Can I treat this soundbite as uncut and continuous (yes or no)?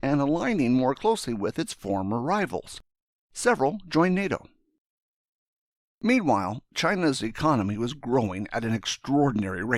yes